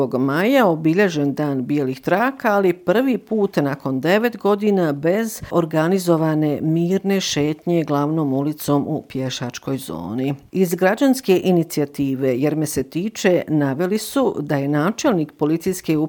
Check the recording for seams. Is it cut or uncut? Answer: uncut